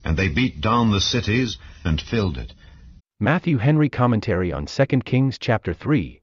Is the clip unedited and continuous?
no; 2 cuts; at 1.8 s, 3.0 s

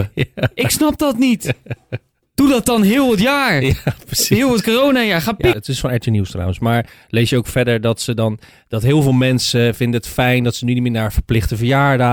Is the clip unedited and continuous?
no; 1 cut; at 5.5 s

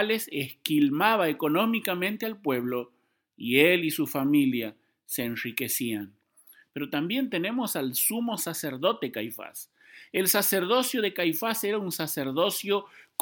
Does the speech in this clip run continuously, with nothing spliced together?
yes; 0 cuts

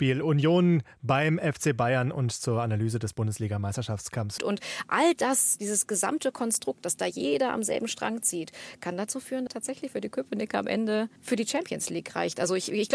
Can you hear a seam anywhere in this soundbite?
yes; 3 cuts; at 4.4 s, 9.5 s, 11.2 s

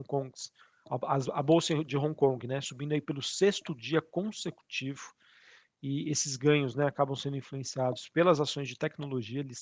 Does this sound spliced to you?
no; 0 cuts

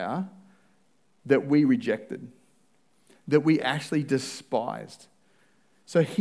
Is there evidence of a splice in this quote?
no; 0 cuts

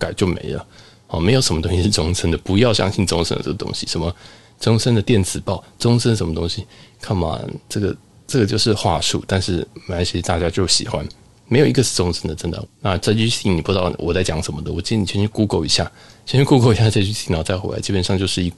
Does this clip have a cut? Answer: yes; 1 cut; at 12.6 s

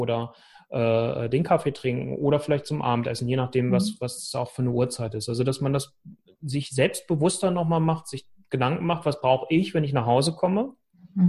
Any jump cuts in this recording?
no; 0 cuts

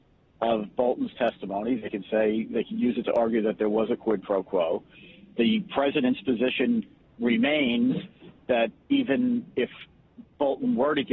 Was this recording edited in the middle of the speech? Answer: no; 0 cuts

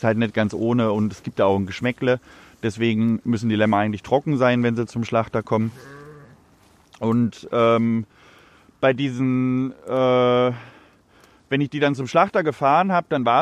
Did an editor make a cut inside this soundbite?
no; 0 cuts

